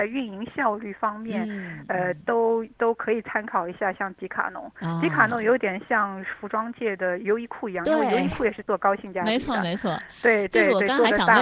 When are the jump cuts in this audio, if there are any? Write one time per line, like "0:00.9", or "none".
none